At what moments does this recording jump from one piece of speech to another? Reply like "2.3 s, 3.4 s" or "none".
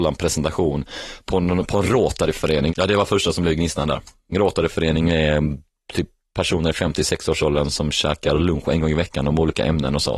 2.7 s, 4.3 s